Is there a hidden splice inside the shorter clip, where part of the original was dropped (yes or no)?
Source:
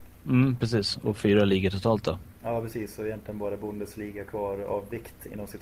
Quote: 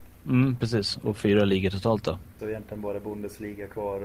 yes